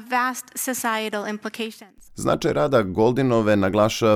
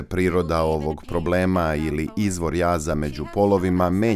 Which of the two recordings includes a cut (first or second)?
first